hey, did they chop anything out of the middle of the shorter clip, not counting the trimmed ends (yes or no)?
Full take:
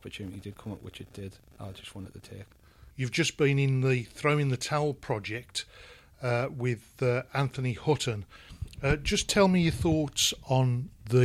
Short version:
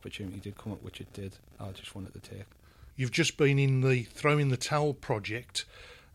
no